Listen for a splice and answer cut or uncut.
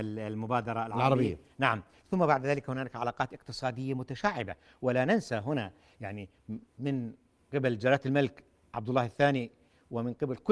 cut